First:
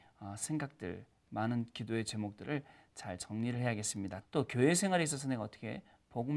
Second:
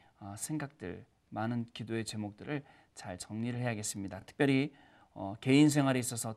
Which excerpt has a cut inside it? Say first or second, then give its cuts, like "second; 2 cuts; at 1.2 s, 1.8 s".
first; 1 cut; at 4.2 s